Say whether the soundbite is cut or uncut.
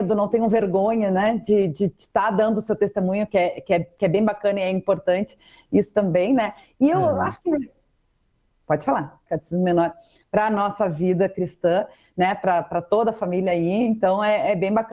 cut